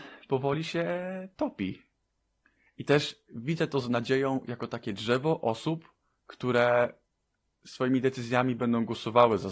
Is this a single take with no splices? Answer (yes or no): yes